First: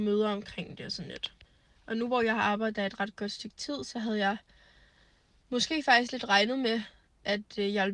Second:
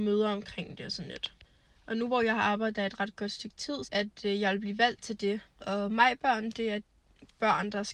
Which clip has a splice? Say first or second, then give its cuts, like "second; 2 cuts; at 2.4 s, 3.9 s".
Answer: second; 2 cuts; at 3.8 s, 5.6 s